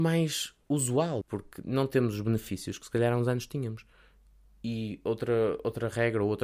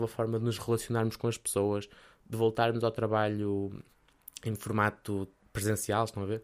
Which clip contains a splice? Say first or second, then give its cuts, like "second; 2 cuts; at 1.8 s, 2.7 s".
first; 1 cut; at 1.2 s